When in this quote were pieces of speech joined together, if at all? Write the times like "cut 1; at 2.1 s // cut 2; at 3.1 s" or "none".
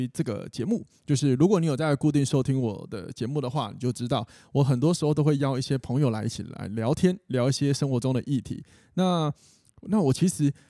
none